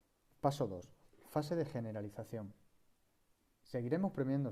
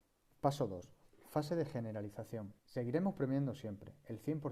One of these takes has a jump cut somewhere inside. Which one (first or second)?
second